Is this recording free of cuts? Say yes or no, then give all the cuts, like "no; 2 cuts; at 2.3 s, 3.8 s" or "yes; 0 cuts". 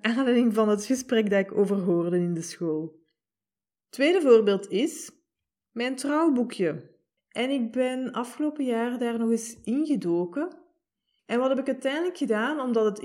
no; 2 cuts; at 7.2 s, 11.2 s